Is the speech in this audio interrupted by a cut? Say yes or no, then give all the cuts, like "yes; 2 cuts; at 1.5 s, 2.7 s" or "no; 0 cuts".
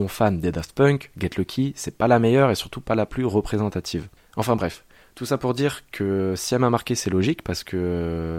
no; 0 cuts